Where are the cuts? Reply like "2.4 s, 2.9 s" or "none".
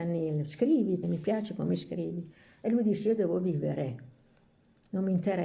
1.0 s

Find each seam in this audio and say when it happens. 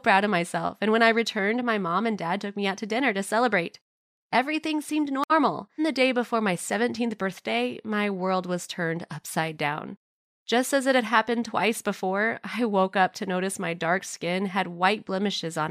5.8 s

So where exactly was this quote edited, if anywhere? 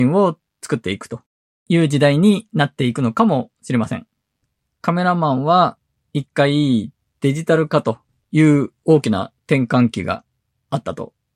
9.4 s

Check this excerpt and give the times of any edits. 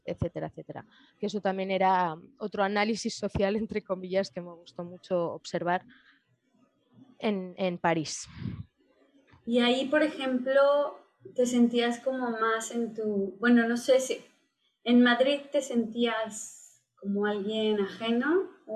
none

